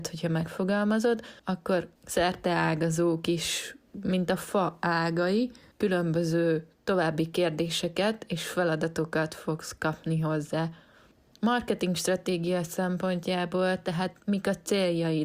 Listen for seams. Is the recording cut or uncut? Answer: uncut